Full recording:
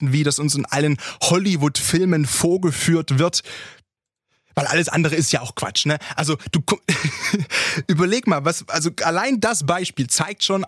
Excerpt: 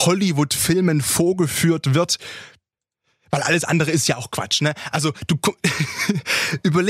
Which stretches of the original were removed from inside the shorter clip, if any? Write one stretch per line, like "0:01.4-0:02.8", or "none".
none

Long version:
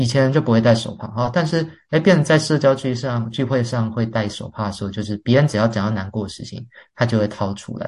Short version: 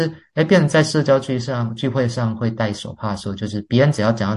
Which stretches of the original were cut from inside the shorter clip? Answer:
none

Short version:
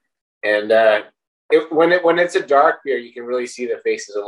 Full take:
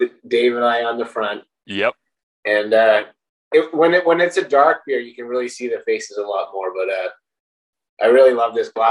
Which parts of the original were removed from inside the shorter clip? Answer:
none

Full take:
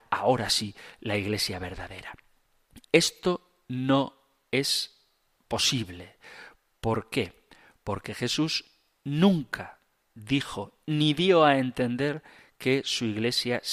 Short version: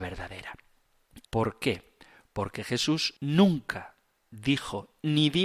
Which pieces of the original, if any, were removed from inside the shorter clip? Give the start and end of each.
0:02.9-0:06.8
0:08.7-0:09.0

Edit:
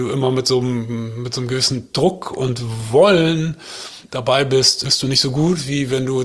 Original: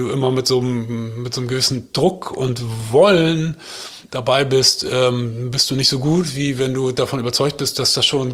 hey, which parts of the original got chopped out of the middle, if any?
0:04.8-0:05.5

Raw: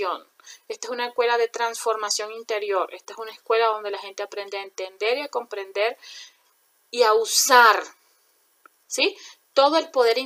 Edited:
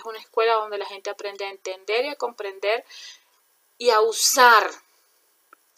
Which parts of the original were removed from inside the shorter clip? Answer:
none

